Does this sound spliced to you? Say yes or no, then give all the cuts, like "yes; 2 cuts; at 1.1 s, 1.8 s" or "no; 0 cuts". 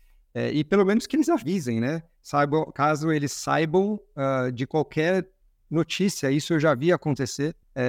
no; 0 cuts